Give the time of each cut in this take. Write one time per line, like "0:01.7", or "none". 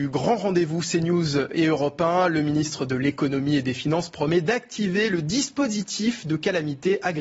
none